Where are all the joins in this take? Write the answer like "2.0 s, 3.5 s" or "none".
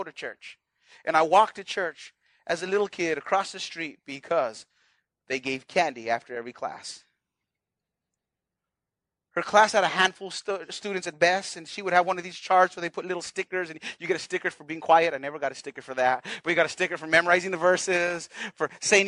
none